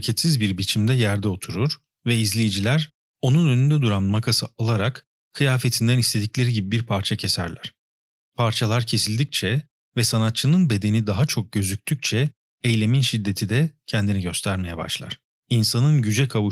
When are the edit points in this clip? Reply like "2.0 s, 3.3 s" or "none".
15.4 s